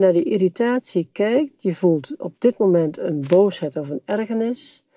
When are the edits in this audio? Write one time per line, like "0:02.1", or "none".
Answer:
none